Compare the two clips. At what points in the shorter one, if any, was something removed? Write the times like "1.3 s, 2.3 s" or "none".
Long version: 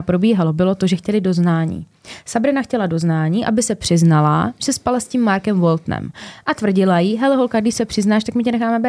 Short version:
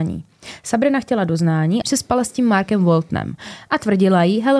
1.8 s